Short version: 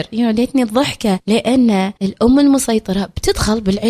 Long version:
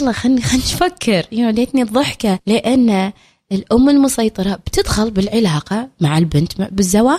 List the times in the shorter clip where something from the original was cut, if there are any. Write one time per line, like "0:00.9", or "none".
0:02.0